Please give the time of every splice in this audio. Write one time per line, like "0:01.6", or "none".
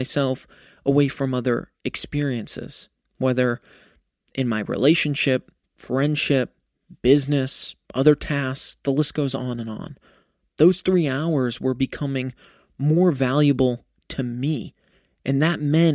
none